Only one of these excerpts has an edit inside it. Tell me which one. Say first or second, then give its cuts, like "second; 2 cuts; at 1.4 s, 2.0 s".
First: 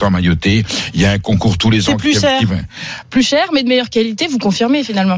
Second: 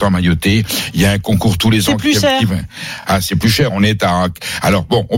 first; 1 cut; at 3.0 s